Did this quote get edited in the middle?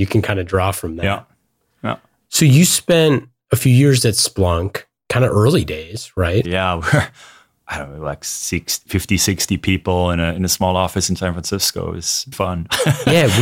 yes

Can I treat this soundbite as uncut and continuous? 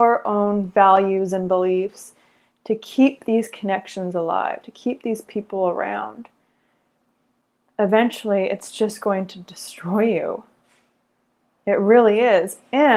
yes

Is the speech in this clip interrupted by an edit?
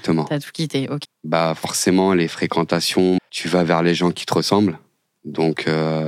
yes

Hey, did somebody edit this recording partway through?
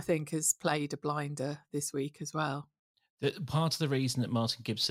no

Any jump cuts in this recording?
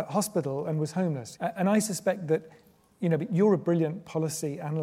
yes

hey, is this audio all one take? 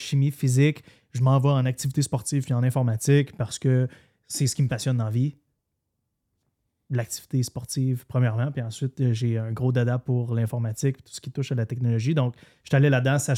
yes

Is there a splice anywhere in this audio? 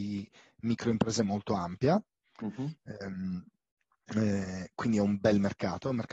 no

